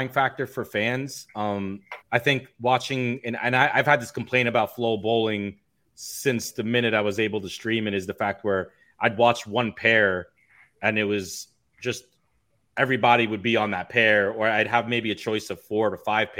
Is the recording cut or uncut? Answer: cut